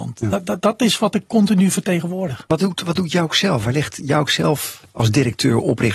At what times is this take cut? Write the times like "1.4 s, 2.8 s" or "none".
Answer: none